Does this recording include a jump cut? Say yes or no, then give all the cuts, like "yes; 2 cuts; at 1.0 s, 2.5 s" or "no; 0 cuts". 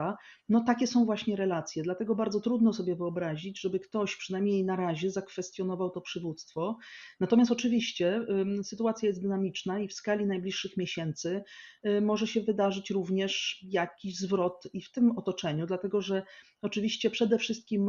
no; 0 cuts